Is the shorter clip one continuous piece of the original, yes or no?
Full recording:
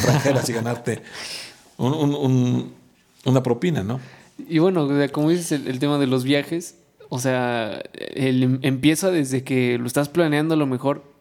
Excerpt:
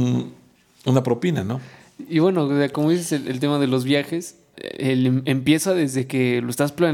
no